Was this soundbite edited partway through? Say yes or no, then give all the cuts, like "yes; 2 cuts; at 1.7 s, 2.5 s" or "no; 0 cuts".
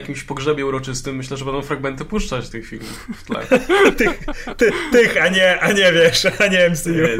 yes; 1 cut; at 2.5 s